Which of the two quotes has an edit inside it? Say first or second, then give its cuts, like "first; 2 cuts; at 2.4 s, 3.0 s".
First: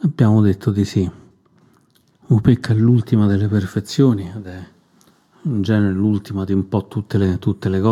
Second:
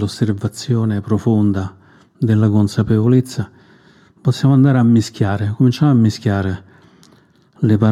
first; 1 cut; at 2.2 s